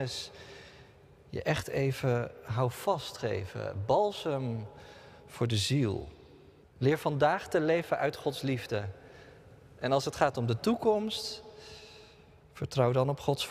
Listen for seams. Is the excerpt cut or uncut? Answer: cut